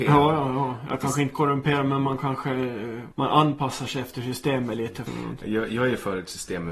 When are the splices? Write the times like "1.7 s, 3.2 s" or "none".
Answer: 3.1 s, 5.1 s